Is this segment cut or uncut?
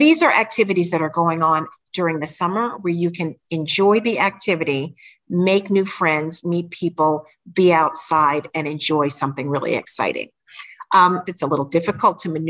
cut